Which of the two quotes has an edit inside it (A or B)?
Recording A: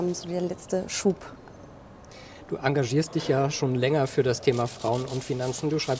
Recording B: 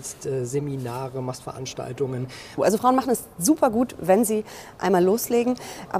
B